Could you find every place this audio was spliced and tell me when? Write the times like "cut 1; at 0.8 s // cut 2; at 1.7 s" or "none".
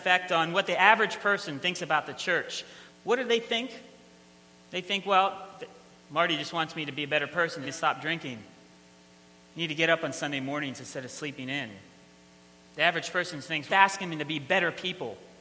cut 1; at 2.9 s // cut 2; at 7.6 s // cut 3; at 13.7 s